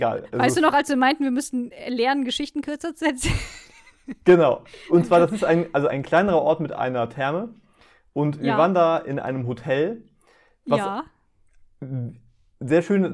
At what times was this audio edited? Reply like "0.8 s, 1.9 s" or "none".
5.9 s